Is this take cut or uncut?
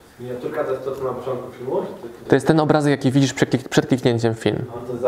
cut